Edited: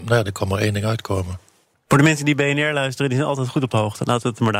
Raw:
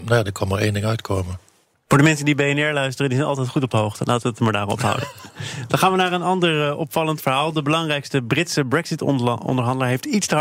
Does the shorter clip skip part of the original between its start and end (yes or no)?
no